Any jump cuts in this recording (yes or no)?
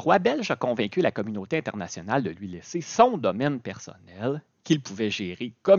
no